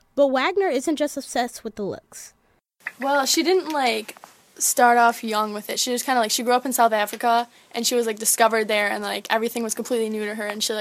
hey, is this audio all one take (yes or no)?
yes